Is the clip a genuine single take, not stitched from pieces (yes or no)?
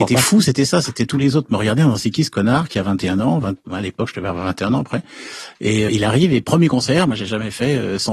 no